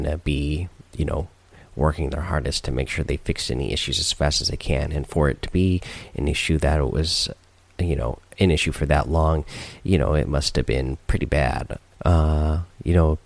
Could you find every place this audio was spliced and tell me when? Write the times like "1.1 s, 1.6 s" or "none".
11.9 s